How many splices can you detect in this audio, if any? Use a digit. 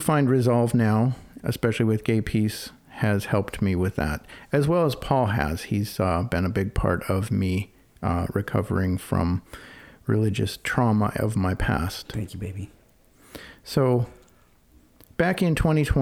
1